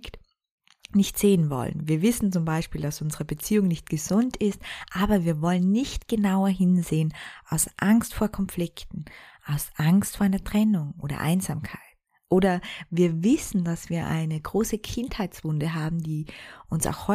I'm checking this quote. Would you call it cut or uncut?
uncut